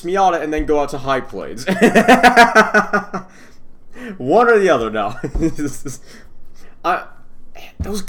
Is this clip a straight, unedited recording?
yes; 0 cuts

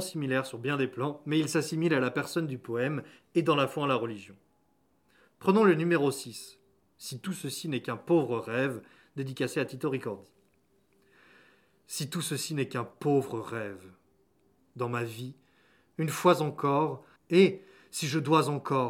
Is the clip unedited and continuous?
no; 2 cuts; at 14.6 s, 17.2 s

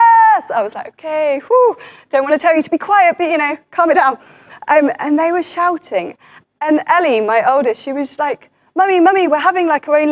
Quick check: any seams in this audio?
no; 0 cuts

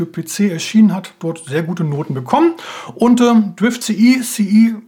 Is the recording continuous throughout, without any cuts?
yes; 0 cuts

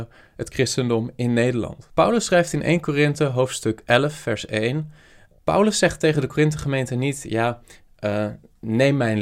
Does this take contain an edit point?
yes; 1 cut; at 5.4 s

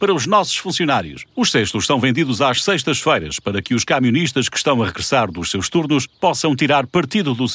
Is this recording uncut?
no; 1 cut; at 1.3 s

